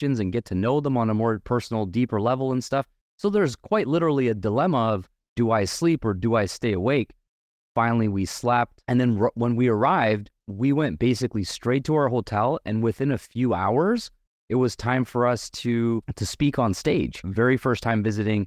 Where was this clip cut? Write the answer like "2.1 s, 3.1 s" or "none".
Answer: 7.5 s